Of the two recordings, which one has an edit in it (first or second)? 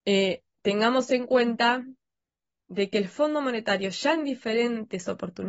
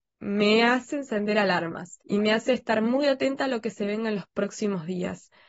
second